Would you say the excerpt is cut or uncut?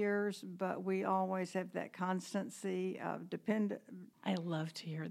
cut